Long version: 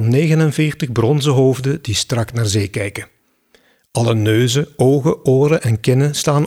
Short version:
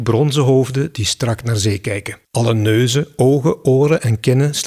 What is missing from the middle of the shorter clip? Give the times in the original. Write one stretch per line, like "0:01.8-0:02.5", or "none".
0:03.1-0:03.8